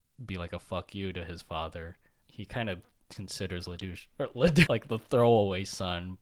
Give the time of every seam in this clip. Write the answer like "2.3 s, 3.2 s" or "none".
2.2 s, 4.7 s